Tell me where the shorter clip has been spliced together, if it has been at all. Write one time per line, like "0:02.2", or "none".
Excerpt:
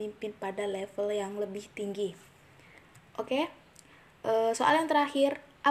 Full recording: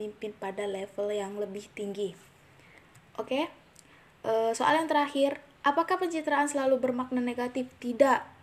none

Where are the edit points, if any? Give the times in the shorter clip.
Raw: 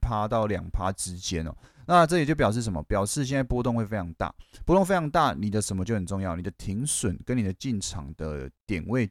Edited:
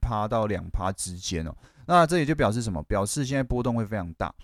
none

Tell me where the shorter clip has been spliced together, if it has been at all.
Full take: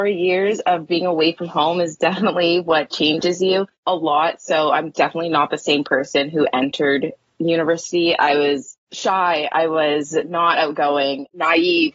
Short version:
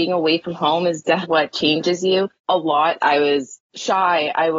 0:01.2
0:03.0

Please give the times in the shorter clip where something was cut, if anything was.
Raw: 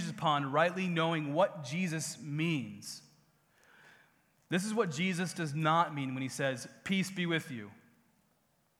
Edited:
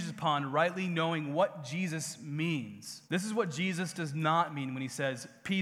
0:03.1

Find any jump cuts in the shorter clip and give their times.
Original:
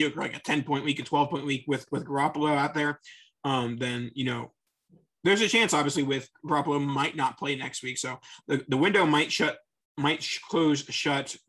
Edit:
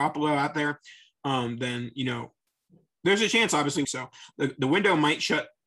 0:03.8

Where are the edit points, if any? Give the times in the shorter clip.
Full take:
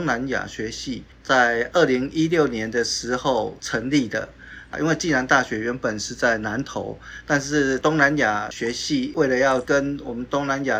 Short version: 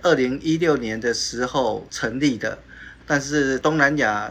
0:03.0

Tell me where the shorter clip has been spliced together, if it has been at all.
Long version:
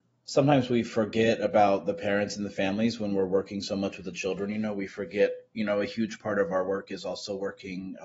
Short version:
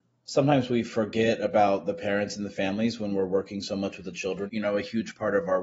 0:04.5

